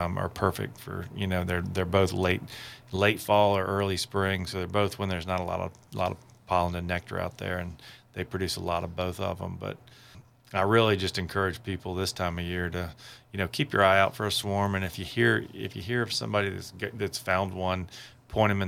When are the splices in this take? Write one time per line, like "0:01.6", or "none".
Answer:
none